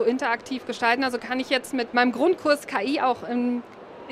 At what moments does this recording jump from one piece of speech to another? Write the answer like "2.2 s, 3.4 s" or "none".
none